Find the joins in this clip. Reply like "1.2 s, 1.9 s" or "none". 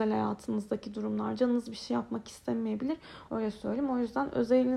3.3 s